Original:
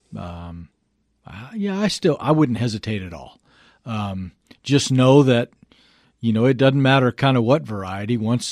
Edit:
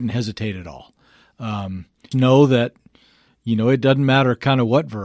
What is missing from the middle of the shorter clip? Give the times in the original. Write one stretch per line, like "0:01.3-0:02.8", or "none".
0:04.6-0:04.9